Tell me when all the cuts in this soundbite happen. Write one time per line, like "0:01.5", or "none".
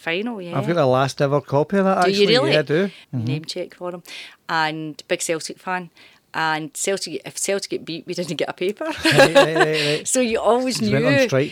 0:03.0